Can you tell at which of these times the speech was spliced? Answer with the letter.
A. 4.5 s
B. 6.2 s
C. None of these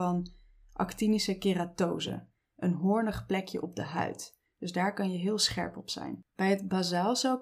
B